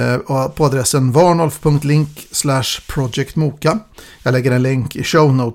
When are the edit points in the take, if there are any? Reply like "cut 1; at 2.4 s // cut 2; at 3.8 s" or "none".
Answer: none